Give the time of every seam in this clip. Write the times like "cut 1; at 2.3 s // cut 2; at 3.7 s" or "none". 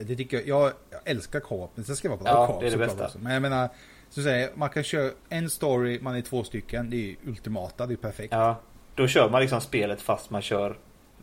none